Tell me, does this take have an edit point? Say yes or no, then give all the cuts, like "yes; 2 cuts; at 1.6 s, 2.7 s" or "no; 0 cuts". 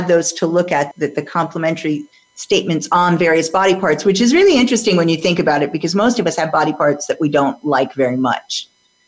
yes; 1 cut; at 0.9 s